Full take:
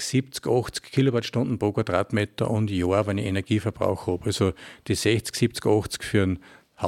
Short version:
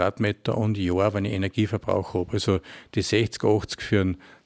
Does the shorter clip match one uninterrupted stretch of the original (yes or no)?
no